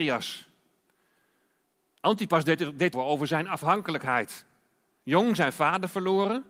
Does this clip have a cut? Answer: yes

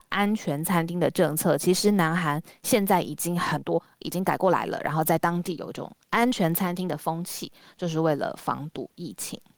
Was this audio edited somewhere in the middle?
no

